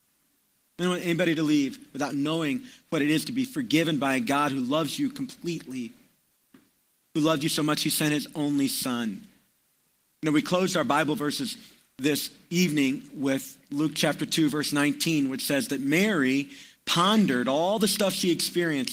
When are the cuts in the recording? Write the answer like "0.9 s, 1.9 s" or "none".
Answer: none